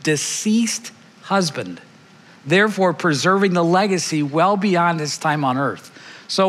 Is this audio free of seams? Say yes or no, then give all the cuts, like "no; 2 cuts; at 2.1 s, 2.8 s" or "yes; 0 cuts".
yes; 0 cuts